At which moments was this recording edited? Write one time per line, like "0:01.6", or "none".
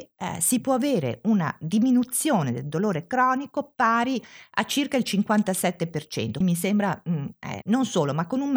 0:06.4
0:07.6